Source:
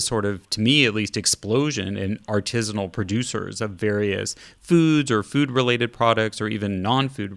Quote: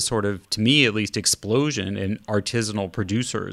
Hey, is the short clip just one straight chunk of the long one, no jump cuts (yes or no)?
yes